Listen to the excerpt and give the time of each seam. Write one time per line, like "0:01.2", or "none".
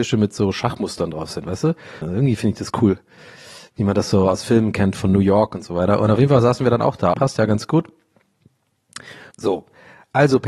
0:02.0
0:07.1
0:09.3